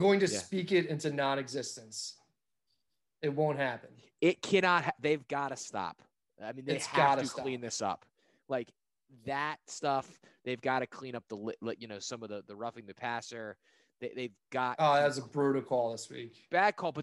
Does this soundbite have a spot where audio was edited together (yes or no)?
no